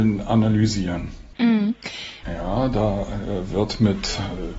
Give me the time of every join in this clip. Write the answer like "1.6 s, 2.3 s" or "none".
2.2 s